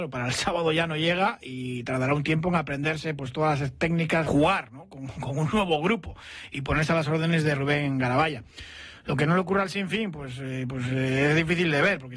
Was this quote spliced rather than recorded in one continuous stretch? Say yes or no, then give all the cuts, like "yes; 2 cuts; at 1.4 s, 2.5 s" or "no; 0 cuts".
yes; 1 cut; at 4.3 s